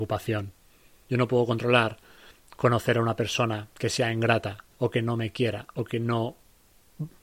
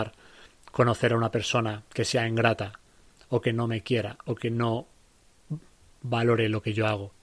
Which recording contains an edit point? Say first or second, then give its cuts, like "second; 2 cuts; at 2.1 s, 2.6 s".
first; 2 cuts; at 1.1 s, 4.7 s